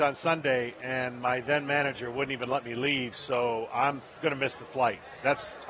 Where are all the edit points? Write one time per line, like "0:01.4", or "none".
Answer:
none